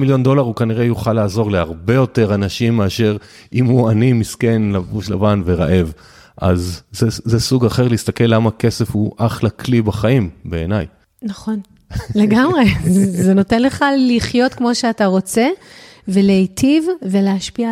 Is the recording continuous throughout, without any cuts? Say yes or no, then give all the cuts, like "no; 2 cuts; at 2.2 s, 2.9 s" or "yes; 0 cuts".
yes; 0 cuts